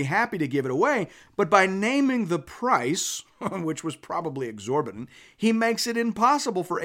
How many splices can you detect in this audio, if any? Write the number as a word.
zero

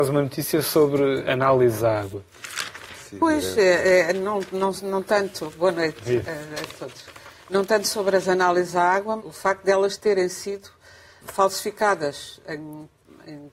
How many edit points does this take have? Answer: two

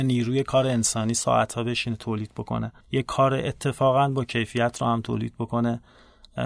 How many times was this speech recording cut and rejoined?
one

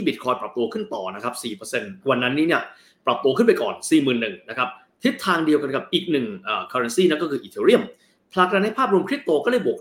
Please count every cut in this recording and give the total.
one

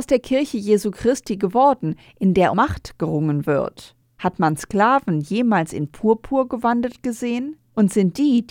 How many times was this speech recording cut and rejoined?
two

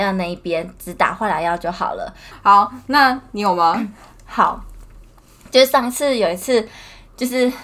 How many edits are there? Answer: one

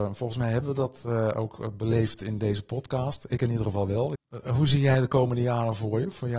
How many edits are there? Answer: one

